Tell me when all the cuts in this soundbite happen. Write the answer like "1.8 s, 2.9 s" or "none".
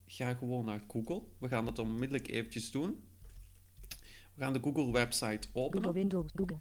none